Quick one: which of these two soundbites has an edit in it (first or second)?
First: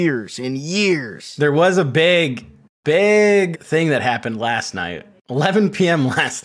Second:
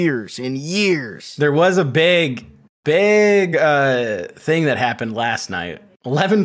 first